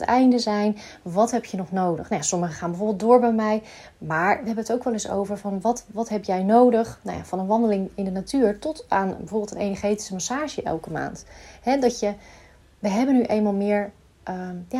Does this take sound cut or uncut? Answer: uncut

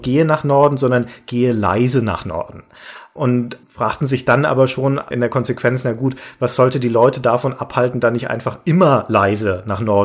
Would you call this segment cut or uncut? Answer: uncut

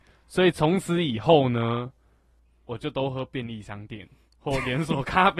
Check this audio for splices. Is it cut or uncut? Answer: uncut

